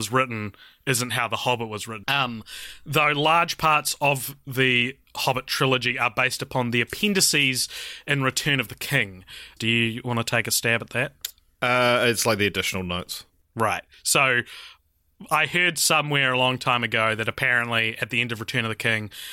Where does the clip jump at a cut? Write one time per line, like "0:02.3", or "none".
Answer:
0:02.0
0:09.6